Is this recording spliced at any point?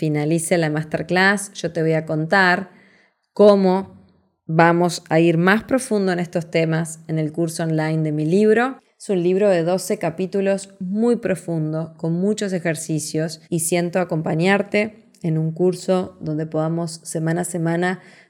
yes; 2 cuts; at 8.8 s, 13.4 s

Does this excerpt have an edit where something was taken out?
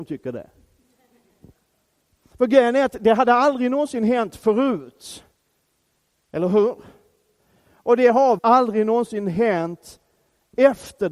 yes; 1 cut; at 8.4 s

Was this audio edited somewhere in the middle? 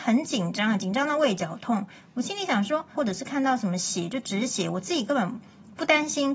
yes; 1 cut; at 2.9 s

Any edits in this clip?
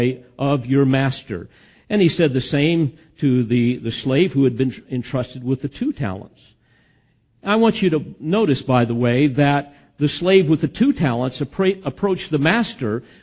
no; 0 cuts

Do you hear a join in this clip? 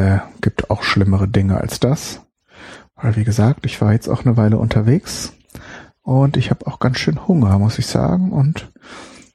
no; 0 cuts

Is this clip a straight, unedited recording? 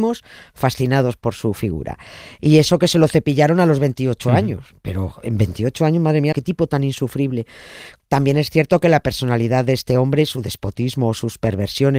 no; 2 cuts; at 6.3 s, 8.0 s

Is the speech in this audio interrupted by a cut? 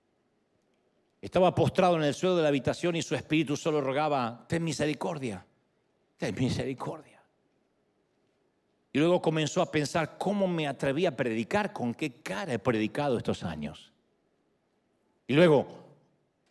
yes; 1 cut; at 15.2 s

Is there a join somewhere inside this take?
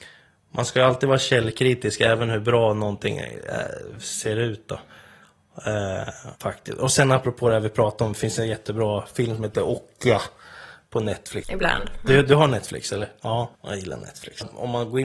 yes; 3 cuts; at 6.3 s, 11.4 s, 13.5 s

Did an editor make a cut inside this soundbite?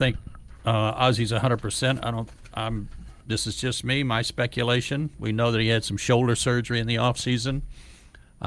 no; 0 cuts

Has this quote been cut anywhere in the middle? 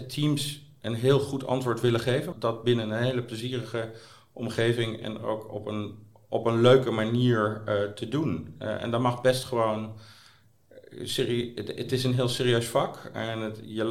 yes; 1 cut; at 2.3 s

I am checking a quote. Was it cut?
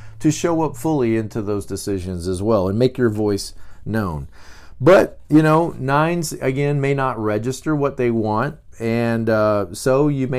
yes; 1 cut; at 8.7 s

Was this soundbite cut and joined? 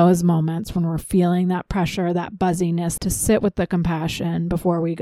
yes; 1 cut; at 3.0 s

